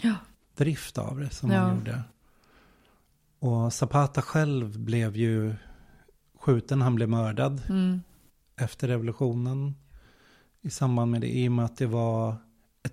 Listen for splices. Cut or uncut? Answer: uncut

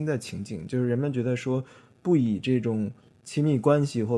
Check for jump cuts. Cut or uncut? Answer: uncut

